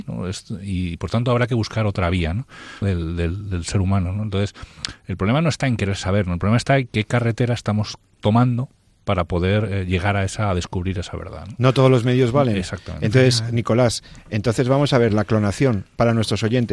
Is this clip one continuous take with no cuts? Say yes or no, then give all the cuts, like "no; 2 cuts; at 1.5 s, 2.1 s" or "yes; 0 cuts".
no; 1 cut; at 2.8 s